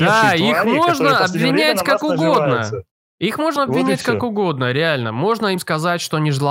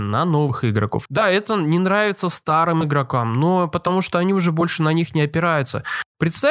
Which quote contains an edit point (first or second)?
second